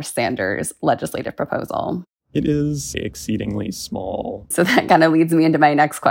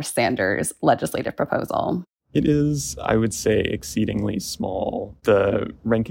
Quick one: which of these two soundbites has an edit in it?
first; 2 cuts; at 2.9 s, 4.5 s

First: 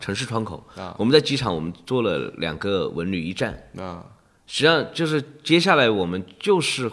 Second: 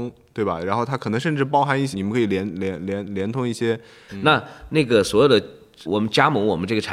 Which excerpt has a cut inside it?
second; 3 cuts; at 1.9 s, 4.1 s, 5.9 s

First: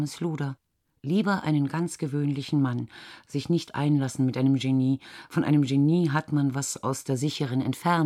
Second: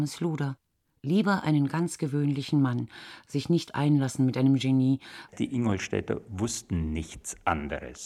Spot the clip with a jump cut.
second; 1 cut; at 5.3 s

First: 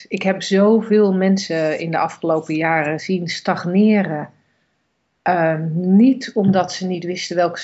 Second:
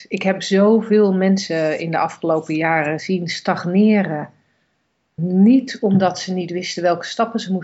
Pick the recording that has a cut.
second; 1 cut; at 5.2 s

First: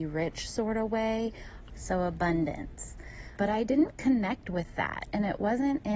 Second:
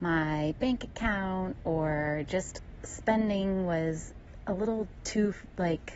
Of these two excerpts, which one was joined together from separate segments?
first; 2 cuts; at 1.7 s, 3.4 s

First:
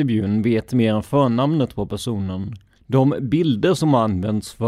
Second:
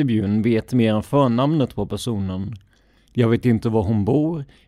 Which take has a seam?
first; 1 cut; at 2.8 s

